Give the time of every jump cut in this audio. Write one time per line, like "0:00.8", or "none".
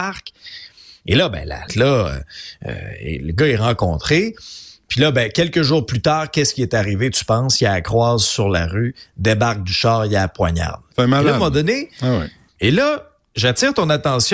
0:01.7
0:10.9
0:12.5